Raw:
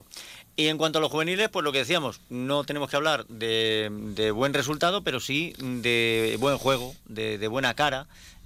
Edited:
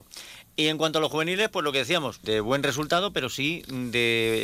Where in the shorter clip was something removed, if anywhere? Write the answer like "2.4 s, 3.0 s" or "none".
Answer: 2.2 s